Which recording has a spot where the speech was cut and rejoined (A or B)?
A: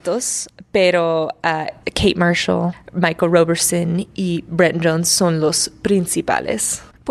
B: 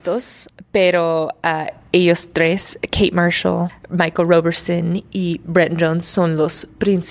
A